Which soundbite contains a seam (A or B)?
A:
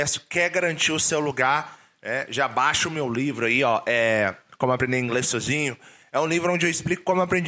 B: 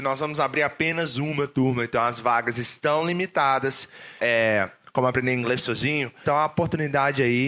B